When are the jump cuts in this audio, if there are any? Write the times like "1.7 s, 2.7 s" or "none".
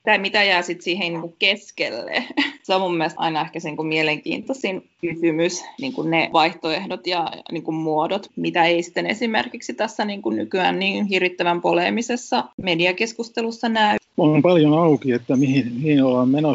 8.3 s, 14.1 s